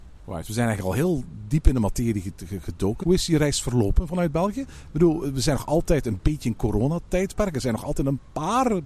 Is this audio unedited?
no; 1 cut; at 3.0 s

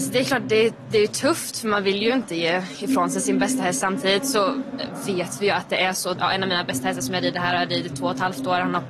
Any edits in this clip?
yes; 1 cut; at 6.1 s

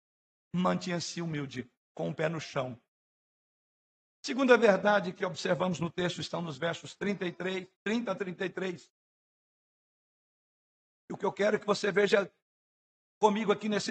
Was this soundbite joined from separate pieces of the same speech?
no; 0 cuts

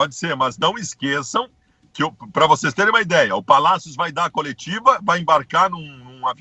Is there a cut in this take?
no; 0 cuts

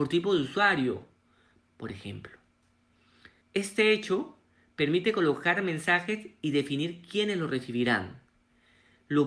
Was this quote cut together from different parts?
yes; 2 cuts; at 1.7 s, 3.4 s

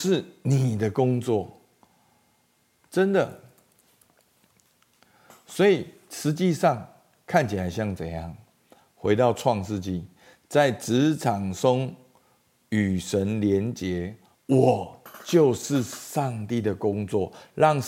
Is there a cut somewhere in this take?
yes; 1 cut; at 14.3 s

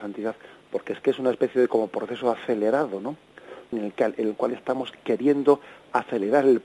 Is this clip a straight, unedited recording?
no; 1 cut; at 3.7 s

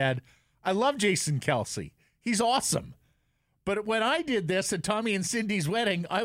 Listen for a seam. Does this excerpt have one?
no; 0 cuts

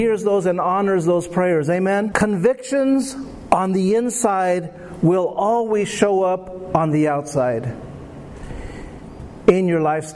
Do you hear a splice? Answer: yes; 1 cut; at 2.1 s

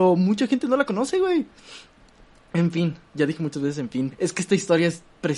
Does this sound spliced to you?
yes; 2 cuts; at 3.1 s, 4.1 s

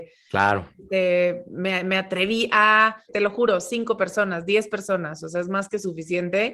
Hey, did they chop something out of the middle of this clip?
yes; 1 cut; at 3.1 s

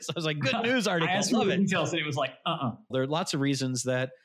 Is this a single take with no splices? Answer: no; 1 cut; at 2.9 s

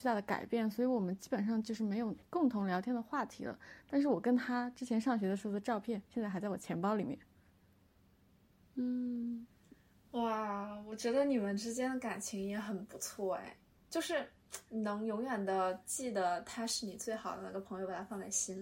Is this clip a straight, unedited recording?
yes; 0 cuts

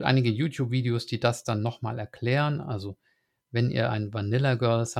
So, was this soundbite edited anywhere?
no; 0 cuts

